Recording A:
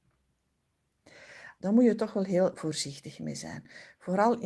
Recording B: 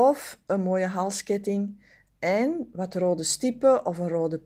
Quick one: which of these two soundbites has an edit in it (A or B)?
A